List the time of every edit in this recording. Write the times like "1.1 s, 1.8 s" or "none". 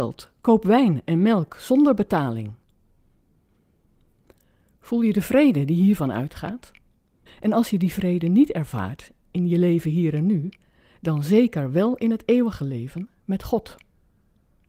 7.3 s